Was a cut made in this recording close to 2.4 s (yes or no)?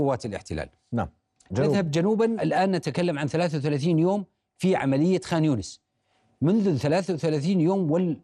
yes